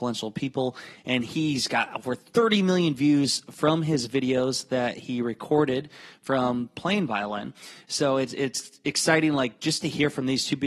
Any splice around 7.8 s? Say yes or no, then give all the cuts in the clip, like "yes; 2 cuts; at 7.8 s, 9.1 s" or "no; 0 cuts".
no; 0 cuts